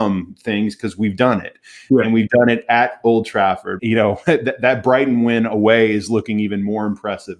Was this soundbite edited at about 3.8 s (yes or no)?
yes